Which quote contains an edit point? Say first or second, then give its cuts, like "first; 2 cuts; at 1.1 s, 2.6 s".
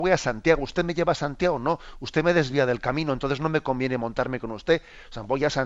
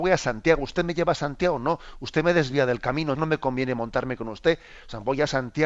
second; 1 cut; at 3.2 s